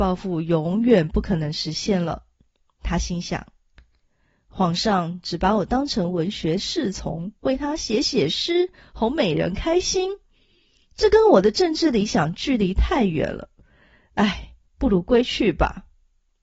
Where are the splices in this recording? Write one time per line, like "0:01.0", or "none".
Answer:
none